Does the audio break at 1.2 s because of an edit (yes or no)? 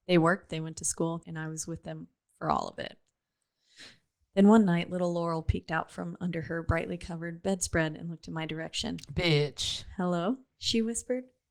yes